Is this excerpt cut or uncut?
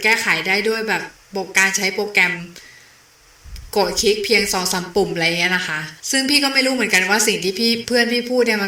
cut